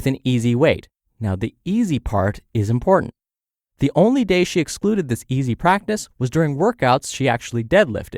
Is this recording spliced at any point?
no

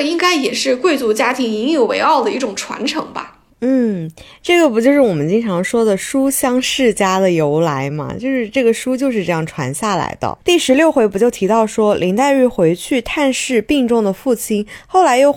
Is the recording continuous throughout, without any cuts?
no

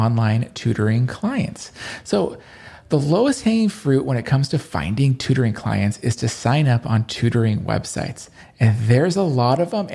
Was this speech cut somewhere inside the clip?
no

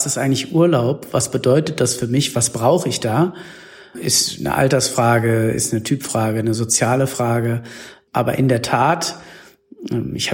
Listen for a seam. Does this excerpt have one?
no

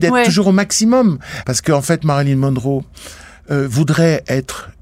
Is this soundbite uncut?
no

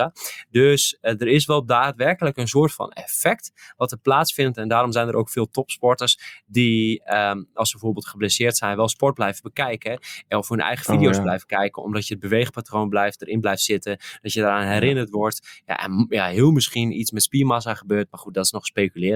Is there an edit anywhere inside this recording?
no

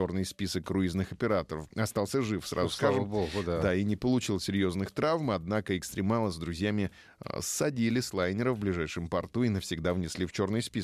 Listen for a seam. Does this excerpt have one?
yes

